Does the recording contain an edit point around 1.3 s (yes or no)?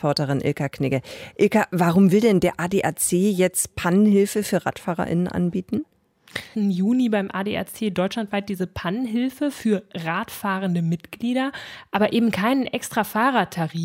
no